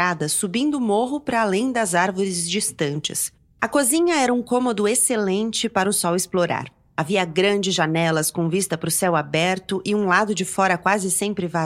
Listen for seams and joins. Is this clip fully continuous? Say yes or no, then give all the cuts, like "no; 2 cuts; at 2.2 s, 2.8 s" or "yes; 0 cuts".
no; 1 cut; at 3.6 s